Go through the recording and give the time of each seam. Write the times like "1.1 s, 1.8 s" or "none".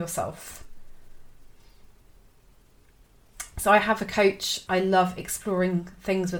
4.7 s